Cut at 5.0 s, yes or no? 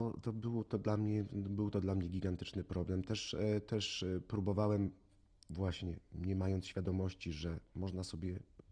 no